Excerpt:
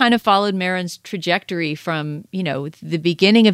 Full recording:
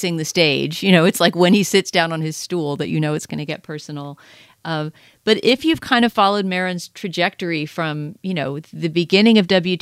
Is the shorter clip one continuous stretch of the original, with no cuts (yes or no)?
yes